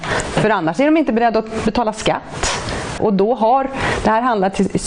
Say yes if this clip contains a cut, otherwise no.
yes